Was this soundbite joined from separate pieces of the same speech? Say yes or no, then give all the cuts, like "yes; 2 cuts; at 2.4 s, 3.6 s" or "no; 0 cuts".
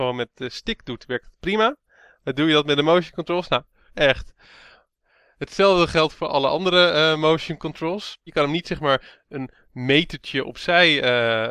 yes; 2 cuts; at 3.9 s, 8.3 s